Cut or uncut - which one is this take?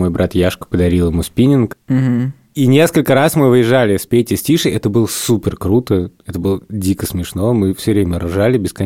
uncut